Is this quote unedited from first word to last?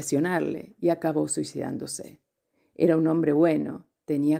yes; 0 cuts

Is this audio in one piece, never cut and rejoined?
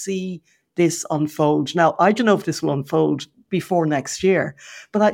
yes; 0 cuts

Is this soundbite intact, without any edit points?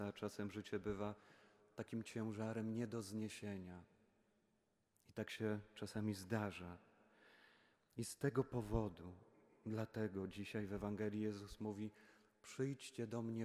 yes; 0 cuts

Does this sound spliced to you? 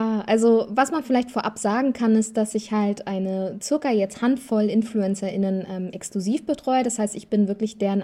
no; 0 cuts

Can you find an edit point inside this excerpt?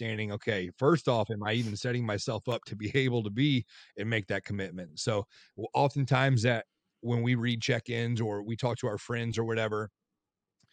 no; 0 cuts

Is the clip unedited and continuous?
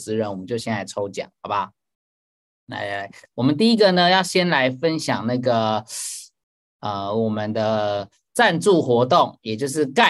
yes; 0 cuts

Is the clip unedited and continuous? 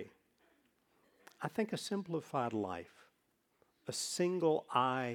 yes; 0 cuts

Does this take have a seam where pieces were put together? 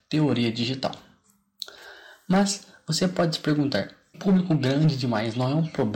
yes; 1 cut; at 4.1 s

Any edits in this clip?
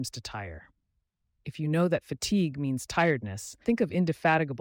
yes; 1 cut; at 3.6 s

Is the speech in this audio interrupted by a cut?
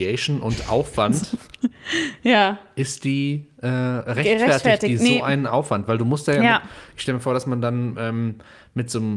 no; 0 cuts

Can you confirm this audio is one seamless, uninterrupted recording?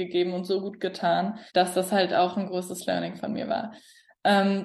no; 1 cut; at 1.5 s

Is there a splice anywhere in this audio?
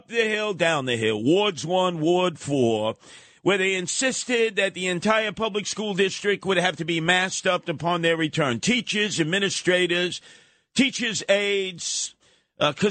no; 0 cuts

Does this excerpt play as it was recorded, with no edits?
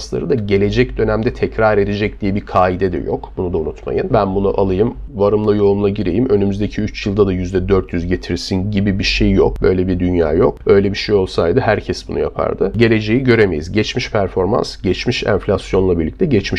no; 1 cut; at 4.1 s

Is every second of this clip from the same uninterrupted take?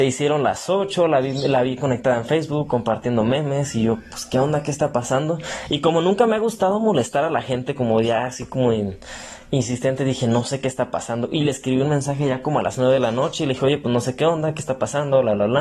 yes; 0 cuts

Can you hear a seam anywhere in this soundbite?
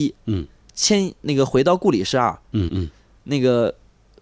yes; 1 cut; at 2.7 s

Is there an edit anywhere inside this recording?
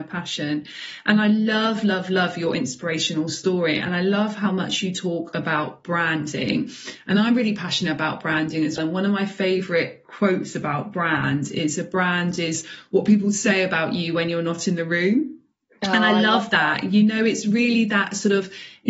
yes; 1 cut; at 8.8 s

